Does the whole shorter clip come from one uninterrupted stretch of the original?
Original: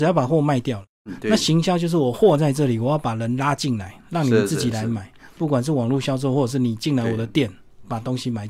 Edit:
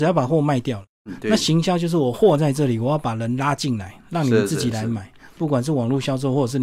yes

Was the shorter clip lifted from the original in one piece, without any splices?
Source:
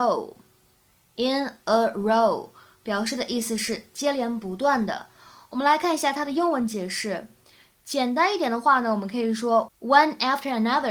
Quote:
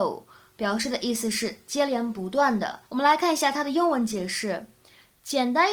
no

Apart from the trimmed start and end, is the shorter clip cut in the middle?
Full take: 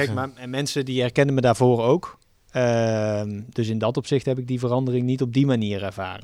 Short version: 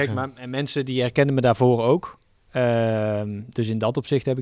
no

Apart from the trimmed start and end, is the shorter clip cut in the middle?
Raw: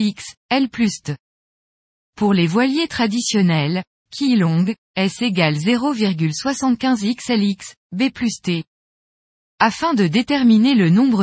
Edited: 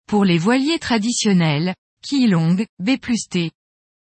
yes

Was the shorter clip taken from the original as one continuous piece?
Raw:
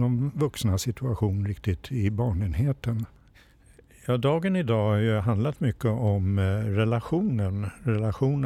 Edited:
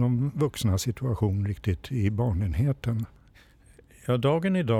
yes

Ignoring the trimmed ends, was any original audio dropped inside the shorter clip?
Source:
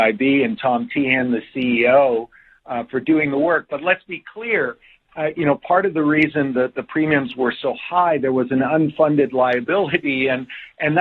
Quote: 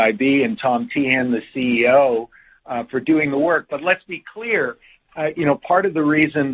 no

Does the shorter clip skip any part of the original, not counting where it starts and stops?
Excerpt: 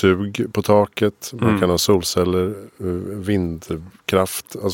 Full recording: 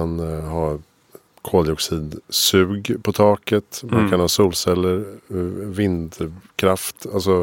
no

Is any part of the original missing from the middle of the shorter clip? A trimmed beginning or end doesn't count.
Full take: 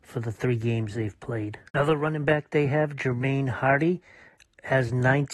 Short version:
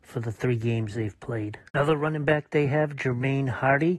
no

